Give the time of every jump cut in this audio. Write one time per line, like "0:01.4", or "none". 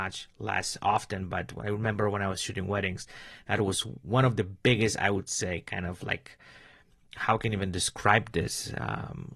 none